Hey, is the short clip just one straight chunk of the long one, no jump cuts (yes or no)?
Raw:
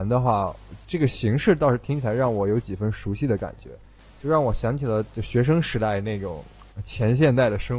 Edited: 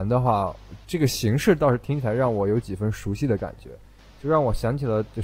yes